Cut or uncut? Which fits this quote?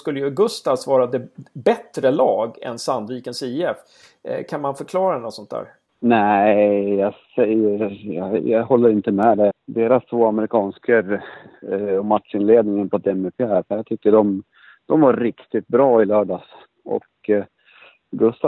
cut